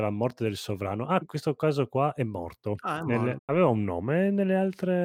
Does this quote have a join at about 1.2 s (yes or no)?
yes